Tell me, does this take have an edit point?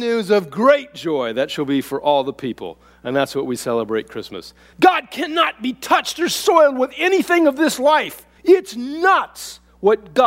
yes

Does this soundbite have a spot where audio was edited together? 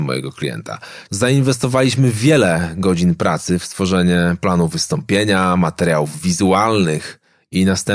yes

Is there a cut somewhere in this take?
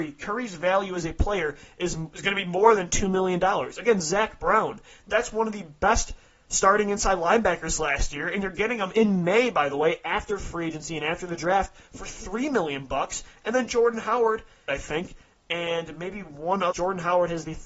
yes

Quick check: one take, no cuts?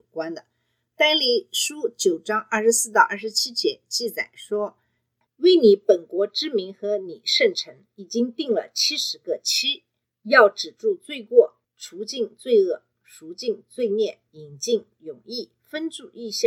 yes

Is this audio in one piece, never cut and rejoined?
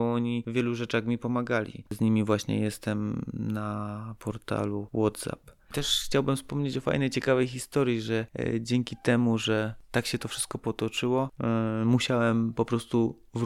no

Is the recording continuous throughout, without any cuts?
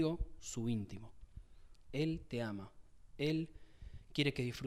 no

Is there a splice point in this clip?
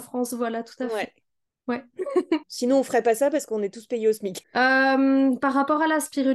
yes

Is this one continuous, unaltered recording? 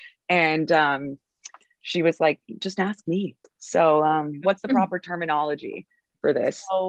no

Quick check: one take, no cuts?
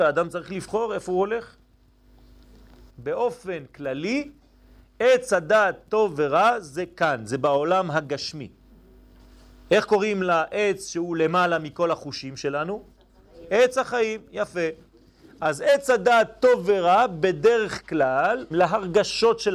no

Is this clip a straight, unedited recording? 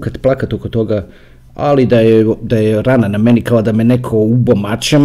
yes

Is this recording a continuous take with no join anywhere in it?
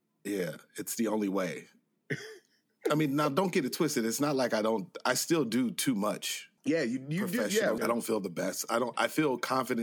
no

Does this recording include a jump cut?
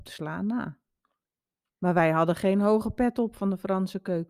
yes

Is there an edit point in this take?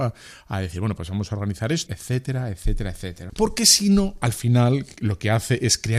yes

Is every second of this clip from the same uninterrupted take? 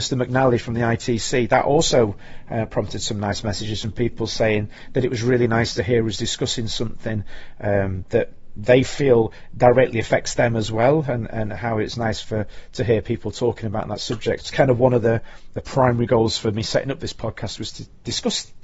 no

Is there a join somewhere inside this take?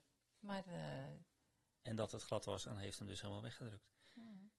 yes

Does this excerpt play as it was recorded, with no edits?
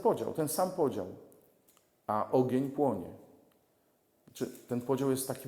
yes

